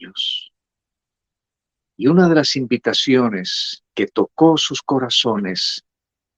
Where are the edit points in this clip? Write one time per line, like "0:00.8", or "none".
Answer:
0:01.8
0:03.9